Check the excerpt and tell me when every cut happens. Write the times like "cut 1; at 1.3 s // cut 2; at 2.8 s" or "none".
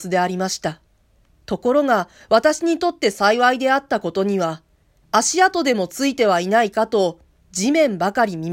cut 1; at 1.3 s // cut 2; at 5.0 s